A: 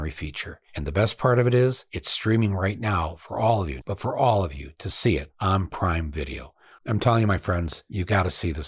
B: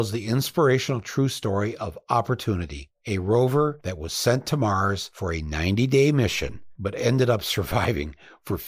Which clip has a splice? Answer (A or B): A